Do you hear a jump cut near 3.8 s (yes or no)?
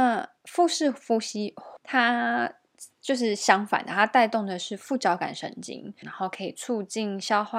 no